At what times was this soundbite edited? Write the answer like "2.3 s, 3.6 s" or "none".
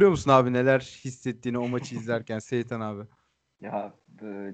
none

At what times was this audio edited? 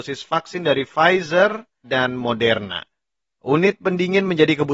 1.8 s

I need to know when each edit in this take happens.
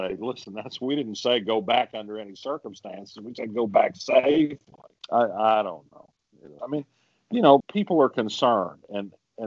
6.6 s, 7.6 s

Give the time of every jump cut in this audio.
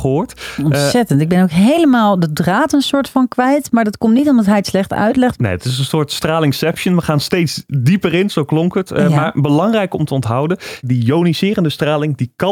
5.4 s

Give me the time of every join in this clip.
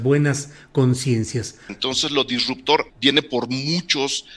1.7 s, 2.9 s

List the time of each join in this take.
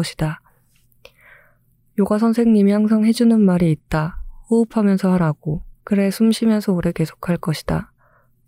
5.8 s

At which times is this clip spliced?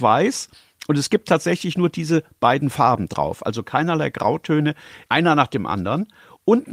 5.1 s

